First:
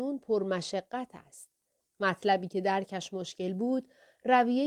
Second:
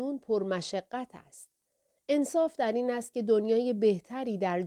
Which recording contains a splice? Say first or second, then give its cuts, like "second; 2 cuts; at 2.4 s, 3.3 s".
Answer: first; 1 cut; at 1.8 s